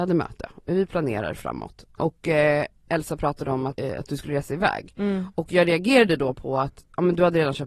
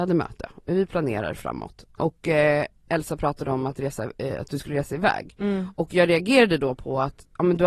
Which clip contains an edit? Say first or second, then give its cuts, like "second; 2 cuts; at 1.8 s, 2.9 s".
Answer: first; 1 cut; at 3.7 s